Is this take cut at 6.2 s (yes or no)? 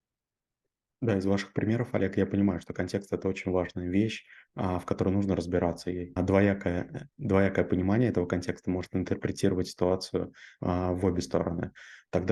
yes